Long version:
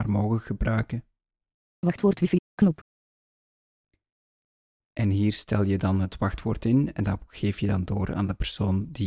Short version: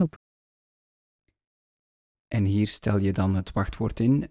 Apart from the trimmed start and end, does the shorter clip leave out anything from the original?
no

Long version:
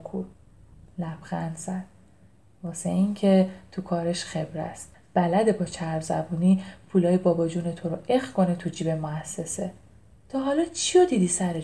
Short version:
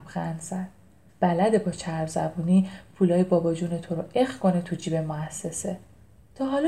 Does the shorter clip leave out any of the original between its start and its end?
yes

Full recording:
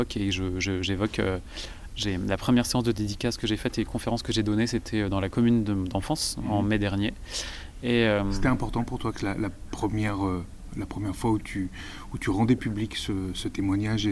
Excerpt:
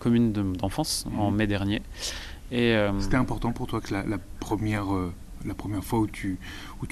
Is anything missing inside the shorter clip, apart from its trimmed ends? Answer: no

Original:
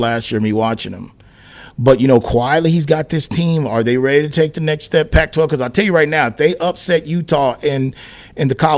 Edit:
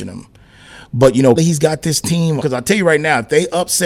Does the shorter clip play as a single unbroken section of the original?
no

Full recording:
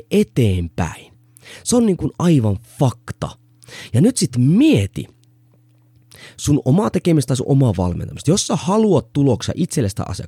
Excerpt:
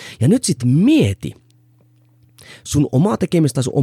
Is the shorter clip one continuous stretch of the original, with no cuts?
yes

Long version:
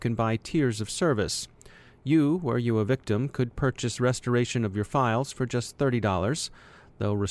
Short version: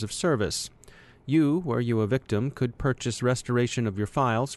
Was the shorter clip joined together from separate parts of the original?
no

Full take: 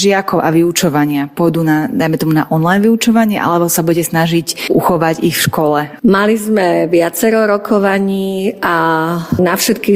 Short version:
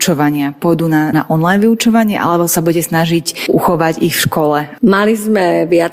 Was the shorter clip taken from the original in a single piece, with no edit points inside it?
no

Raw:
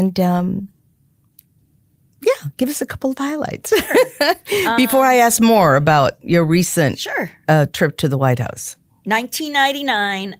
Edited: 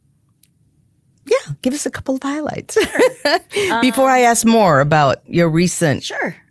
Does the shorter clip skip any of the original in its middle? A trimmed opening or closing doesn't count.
no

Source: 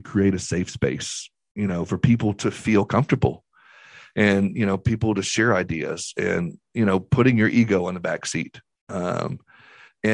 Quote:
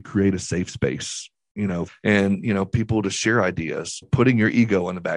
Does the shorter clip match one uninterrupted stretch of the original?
no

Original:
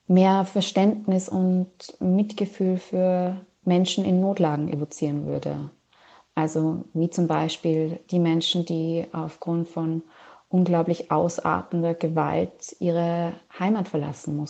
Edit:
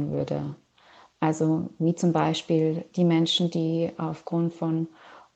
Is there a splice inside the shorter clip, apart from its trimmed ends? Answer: no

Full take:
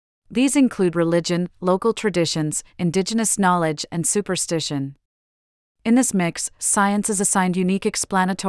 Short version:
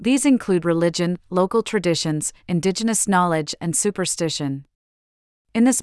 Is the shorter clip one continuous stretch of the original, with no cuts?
yes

